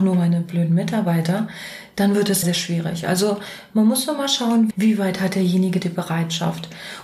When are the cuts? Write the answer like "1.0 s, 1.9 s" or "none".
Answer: 2.4 s, 4.7 s